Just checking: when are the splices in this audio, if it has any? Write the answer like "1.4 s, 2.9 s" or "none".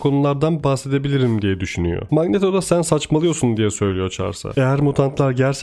2.1 s